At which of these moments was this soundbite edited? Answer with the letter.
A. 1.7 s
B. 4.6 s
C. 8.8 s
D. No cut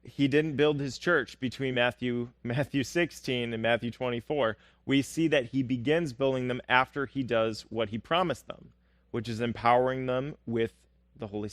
D